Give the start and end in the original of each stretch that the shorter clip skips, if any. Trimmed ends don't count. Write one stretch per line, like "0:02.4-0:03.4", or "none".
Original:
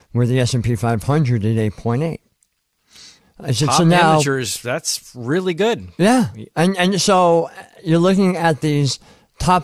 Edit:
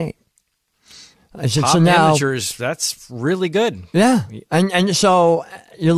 none